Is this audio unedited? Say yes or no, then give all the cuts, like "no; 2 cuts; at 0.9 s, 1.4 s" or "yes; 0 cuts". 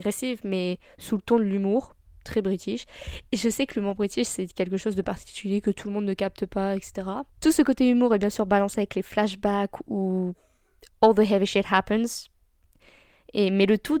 yes; 0 cuts